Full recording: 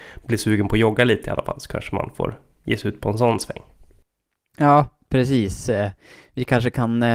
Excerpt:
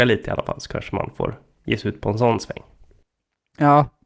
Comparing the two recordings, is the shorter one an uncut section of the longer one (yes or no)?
yes